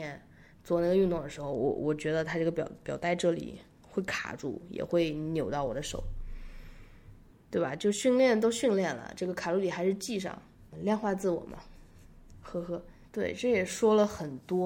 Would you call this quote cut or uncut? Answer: cut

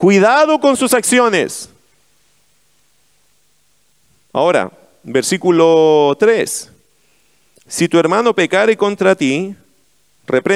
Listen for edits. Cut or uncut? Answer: uncut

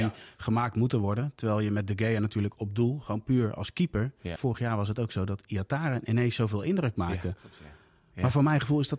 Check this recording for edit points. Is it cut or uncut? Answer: cut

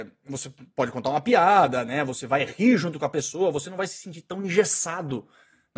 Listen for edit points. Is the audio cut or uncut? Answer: uncut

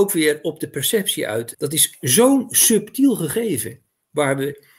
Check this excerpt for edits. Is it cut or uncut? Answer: cut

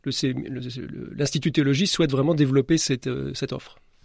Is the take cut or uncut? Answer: uncut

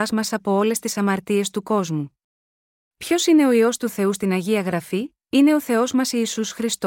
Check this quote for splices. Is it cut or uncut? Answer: cut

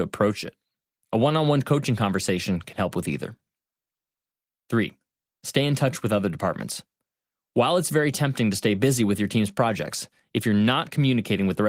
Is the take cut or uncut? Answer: uncut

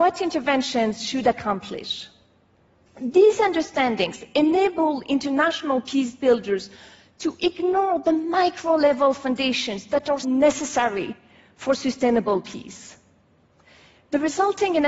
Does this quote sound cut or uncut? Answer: cut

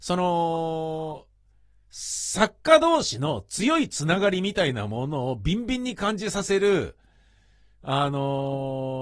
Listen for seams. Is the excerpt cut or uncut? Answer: uncut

